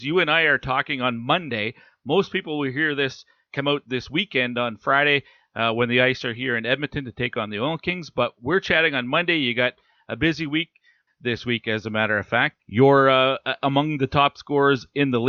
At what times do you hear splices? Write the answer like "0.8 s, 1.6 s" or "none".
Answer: 11.1 s, 12.6 s